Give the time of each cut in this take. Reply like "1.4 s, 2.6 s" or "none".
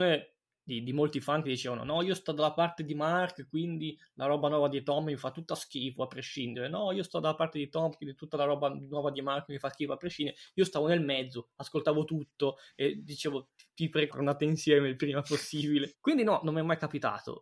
14.1 s, 15.9 s